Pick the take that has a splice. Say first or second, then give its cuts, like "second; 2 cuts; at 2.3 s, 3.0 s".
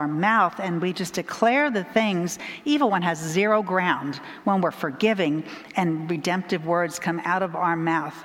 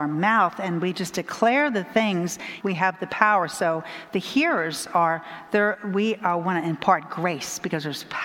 second; 1 cut; at 2.6 s